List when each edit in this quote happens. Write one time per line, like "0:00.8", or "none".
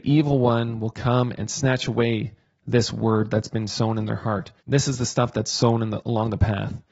0:04.6